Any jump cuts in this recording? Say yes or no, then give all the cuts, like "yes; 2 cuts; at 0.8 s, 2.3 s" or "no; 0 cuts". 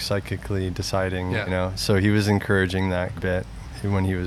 yes; 2 cuts; at 1.5 s, 3.2 s